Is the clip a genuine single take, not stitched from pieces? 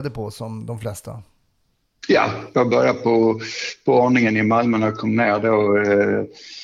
yes; 0 cuts

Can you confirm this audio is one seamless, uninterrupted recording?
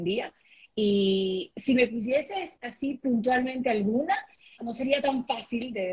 no; 1 cut; at 4.6 s

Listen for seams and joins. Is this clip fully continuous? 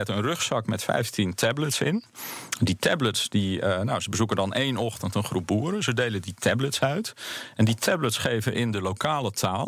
yes; 0 cuts

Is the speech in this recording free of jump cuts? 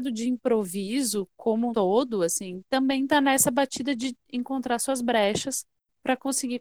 no; 1 cut; at 1.7 s

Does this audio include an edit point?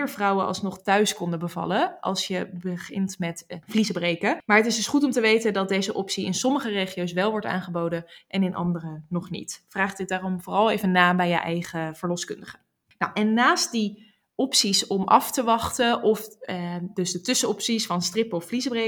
no; 0 cuts

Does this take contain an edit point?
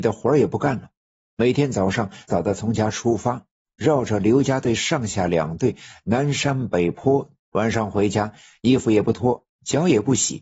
yes; 2 cuts; at 2.3 s, 7.4 s

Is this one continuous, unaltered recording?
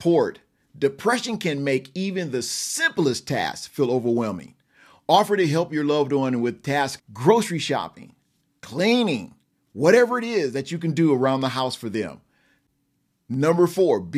no; 2 cuts; at 7.0 s, 8.6 s

